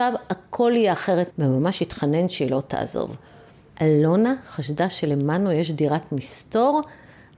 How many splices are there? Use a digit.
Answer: 2